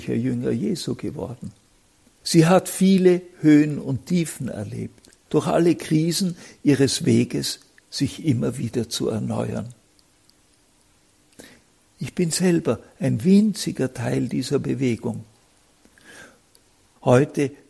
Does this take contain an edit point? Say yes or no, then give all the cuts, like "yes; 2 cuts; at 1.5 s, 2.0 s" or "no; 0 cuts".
yes; 2 cuts; at 2.2 s, 5.3 s